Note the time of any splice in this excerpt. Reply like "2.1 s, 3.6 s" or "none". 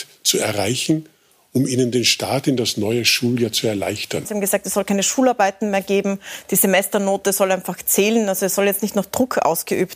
4.2 s